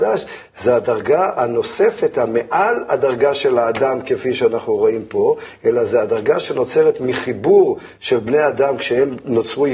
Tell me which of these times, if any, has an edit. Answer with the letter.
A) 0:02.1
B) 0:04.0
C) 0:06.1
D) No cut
D